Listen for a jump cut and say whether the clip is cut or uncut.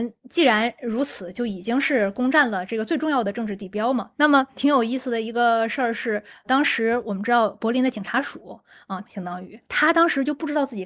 cut